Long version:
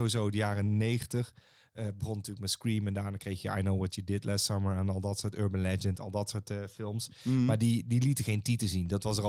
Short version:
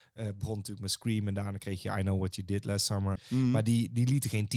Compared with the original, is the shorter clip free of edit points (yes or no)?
no